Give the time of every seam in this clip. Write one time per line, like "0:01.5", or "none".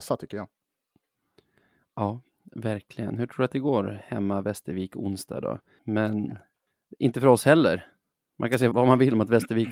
0:05.8
0:08.7

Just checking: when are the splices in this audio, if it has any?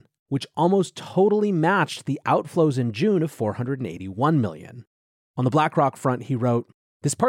0:05.2

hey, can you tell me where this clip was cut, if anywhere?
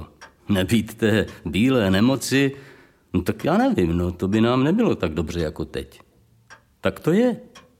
none

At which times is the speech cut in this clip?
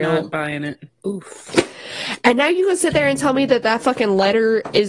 0:01.0

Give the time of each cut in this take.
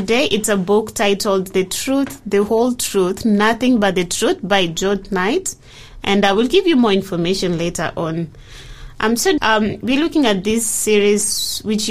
0:09.4

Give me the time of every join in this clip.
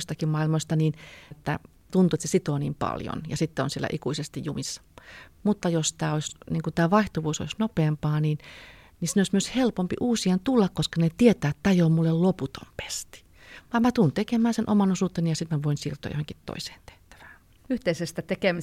0:01.3

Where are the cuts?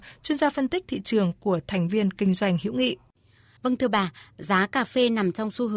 none

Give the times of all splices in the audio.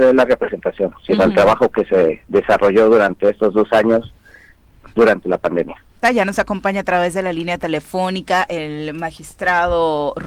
0:06.0

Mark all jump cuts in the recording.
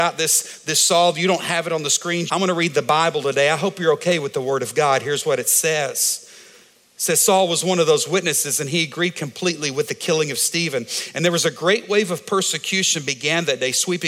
0:02.3

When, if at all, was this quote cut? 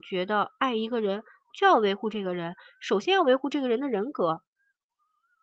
0:01.5

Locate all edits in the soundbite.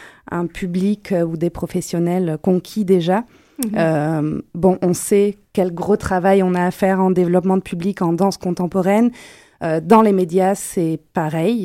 none

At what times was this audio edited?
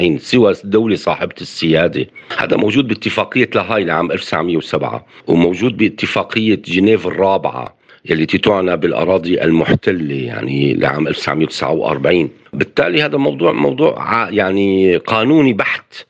none

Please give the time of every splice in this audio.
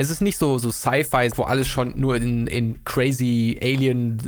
0:01.3

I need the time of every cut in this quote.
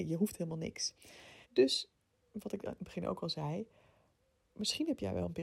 0:01.4

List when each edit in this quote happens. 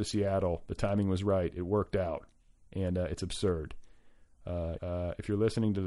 0:04.8

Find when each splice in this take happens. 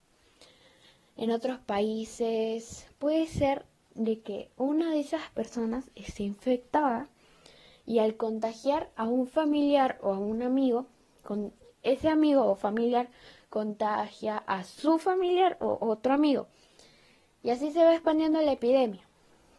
none

